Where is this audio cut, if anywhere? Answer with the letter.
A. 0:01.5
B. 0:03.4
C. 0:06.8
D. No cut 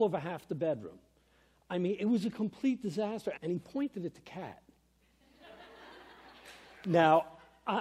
B